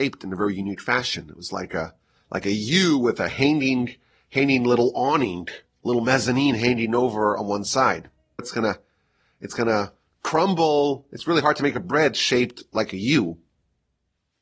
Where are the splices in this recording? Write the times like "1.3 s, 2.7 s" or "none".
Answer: 8.4 s